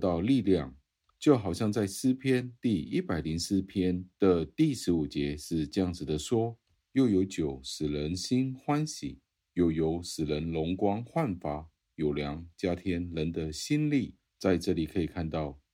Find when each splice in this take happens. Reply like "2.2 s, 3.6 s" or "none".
none